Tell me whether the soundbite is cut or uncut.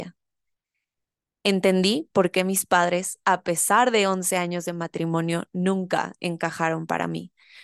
uncut